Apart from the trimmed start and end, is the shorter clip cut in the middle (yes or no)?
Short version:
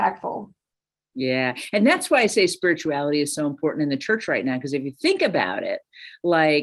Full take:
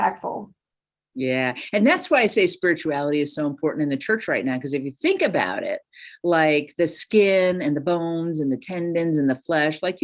no